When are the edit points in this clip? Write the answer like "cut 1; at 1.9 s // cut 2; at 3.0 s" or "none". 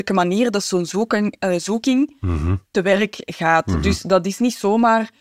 none